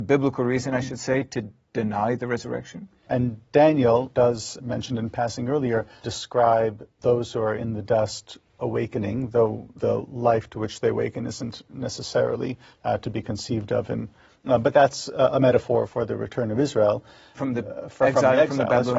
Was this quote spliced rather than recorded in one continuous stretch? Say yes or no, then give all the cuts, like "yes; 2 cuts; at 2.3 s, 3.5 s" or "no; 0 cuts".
yes; 2 cuts; at 3.1 s, 14.3 s